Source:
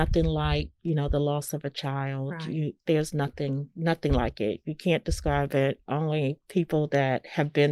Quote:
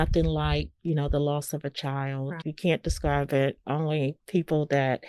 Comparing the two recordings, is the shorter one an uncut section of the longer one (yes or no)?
no